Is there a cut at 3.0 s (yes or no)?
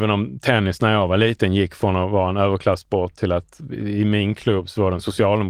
no